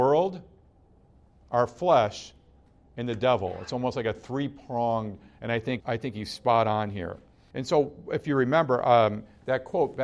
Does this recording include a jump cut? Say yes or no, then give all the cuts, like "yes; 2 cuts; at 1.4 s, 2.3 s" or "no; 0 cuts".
yes; 2 cuts; at 5.8 s, 7.5 s